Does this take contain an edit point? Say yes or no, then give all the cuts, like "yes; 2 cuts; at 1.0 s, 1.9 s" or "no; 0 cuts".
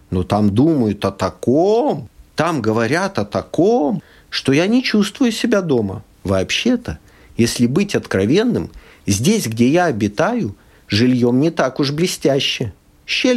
yes; 1 cut; at 6.1 s